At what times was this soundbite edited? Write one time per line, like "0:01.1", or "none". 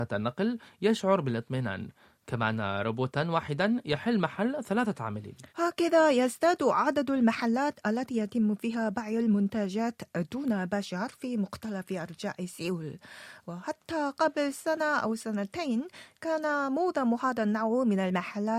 0:05.5